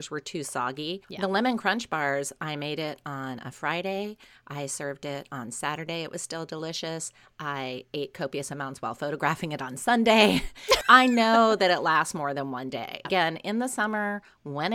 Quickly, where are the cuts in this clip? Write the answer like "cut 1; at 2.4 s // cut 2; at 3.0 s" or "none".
cut 1; at 1.0 s // cut 2; at 10.8 s // cut 3; at 13.0 s